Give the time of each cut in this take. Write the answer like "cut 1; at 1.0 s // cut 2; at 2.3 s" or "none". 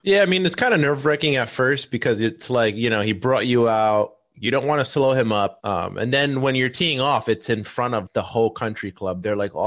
cut 1; at 5.6 s // cut 2; at 8.1 s